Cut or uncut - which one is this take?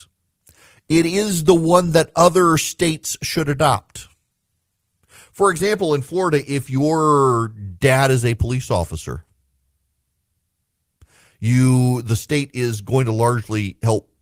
uncut